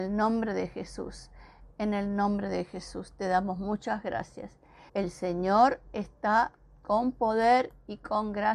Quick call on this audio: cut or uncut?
cut